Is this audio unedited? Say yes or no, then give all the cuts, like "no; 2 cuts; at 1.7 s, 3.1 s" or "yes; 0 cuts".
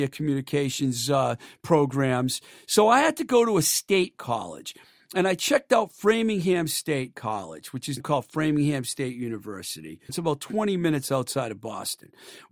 no; 2 cuts; at 8.0 s, 10.1 s